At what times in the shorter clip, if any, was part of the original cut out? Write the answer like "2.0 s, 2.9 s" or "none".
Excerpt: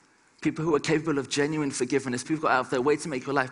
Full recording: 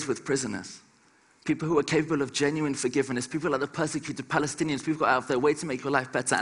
2.2 s